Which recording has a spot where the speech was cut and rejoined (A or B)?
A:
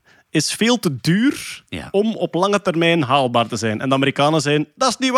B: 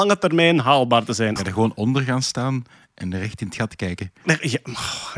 B